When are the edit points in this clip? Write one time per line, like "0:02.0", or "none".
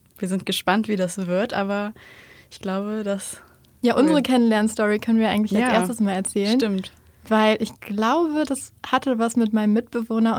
0:03.9